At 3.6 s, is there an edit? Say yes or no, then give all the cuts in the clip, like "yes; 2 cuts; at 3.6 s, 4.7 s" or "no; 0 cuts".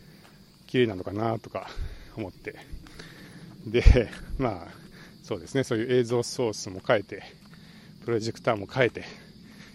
no; 0 cuts